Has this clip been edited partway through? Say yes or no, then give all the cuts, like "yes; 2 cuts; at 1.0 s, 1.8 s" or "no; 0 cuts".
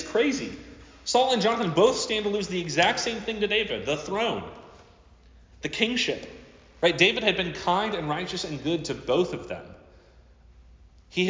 no; 0 cuts